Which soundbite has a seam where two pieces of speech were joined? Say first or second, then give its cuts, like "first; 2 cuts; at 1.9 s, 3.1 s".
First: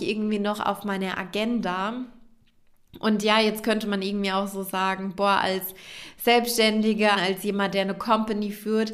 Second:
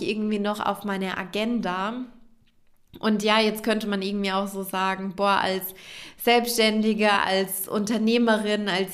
first; 1 cut; at 7.1 s